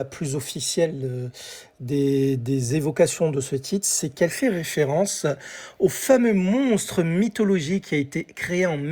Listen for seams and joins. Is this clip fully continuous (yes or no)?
yes